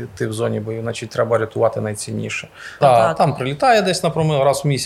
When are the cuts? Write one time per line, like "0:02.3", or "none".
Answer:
0:02.8